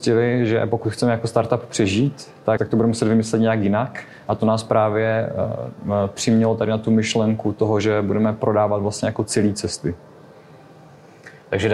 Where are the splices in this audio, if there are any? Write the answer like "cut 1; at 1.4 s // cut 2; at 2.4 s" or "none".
cut 1; at 2.6 s